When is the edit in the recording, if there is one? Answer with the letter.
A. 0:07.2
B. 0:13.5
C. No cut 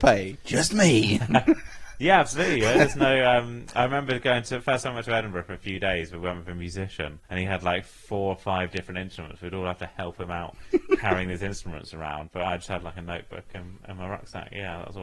A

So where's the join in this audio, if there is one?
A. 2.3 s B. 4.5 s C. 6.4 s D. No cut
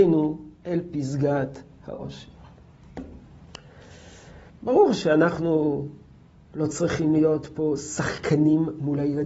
B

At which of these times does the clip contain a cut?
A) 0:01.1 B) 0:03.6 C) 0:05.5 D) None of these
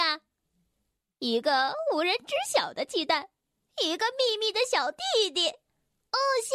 B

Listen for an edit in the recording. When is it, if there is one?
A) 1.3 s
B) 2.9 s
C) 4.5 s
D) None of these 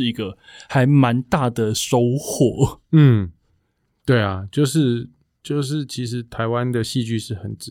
D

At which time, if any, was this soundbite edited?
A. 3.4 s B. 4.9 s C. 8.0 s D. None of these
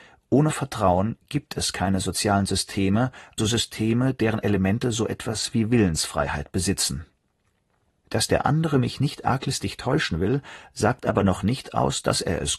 A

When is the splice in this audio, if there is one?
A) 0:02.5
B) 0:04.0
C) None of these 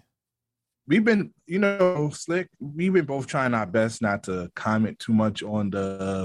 C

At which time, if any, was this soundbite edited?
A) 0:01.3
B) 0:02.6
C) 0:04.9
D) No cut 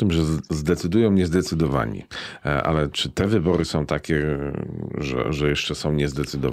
D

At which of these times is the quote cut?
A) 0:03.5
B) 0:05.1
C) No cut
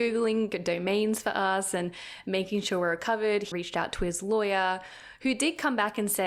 A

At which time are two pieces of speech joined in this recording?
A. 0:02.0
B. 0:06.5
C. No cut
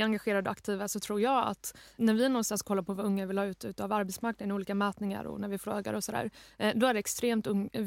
A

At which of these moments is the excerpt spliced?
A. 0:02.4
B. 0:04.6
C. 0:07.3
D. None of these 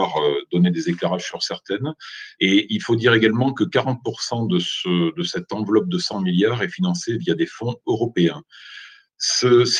A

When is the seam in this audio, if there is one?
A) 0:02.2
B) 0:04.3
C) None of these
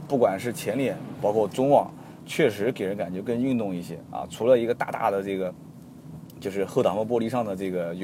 A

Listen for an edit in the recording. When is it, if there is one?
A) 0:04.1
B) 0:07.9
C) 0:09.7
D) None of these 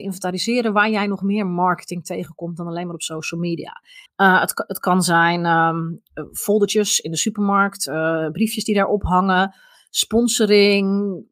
A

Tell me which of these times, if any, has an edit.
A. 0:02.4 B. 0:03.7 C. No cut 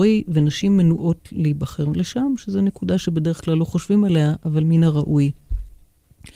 C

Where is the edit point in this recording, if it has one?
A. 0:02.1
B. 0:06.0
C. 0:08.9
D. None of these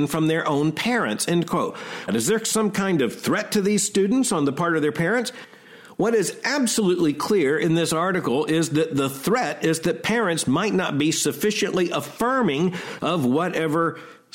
A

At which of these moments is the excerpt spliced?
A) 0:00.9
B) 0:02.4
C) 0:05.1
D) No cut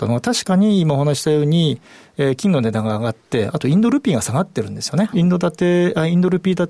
C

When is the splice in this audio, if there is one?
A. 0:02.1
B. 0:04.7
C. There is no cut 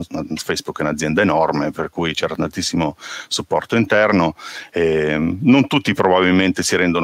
C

